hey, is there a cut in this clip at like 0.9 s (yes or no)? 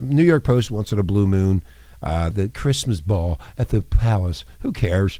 no